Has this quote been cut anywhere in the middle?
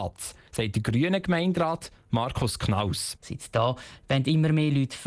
yes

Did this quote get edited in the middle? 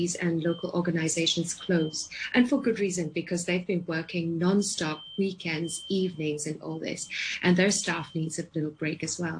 no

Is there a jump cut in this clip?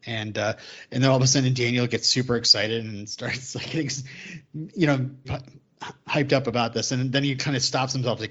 yes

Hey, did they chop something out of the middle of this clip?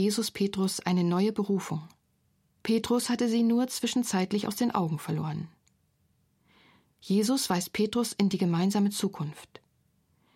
yes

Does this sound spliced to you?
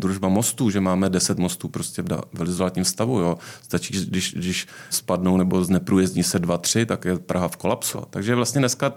yes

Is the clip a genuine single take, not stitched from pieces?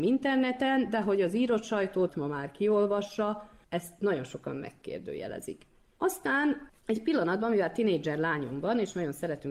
yes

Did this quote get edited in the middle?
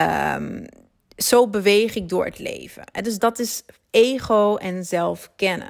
yes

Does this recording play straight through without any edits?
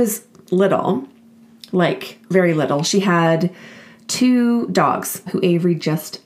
no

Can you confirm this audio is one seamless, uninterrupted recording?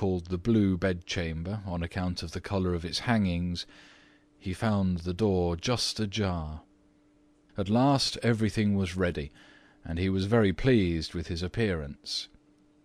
no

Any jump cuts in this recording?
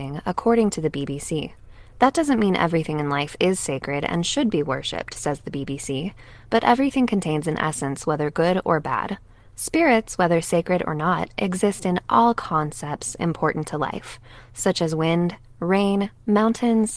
no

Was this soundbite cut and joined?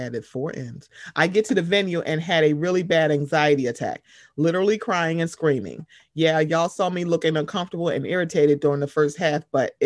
no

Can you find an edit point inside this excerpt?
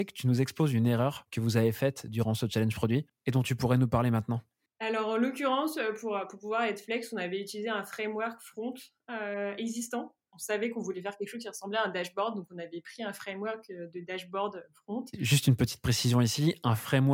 no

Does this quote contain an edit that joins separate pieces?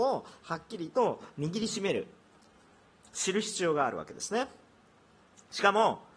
no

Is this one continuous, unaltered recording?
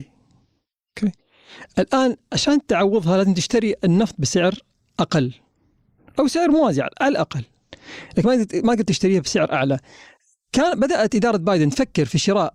yes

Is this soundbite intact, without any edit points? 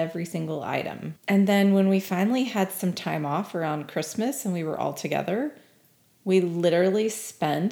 no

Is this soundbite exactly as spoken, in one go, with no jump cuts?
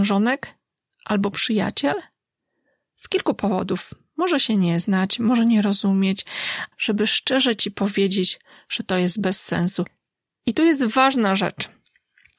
no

